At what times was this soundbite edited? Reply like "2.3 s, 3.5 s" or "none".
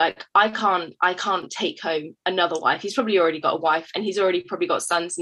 none